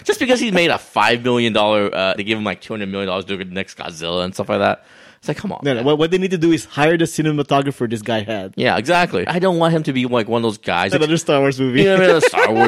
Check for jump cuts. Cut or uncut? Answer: cut